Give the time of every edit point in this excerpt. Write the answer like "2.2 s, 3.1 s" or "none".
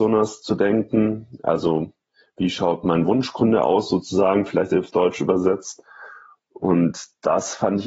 none